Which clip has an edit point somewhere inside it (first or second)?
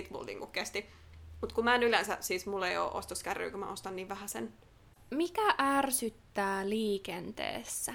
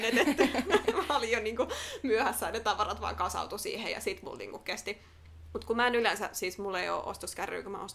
first